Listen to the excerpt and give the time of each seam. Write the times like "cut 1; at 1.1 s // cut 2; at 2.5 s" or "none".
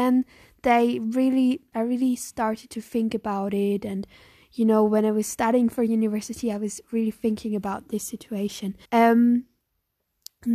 cut 1; at 1.7 s // cut 2; at 8.8 s